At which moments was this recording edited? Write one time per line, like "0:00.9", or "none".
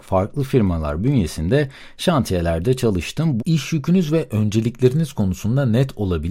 0:03.4